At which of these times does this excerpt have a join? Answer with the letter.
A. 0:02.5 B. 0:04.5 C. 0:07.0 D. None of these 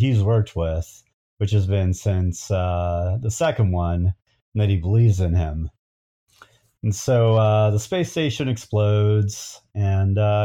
D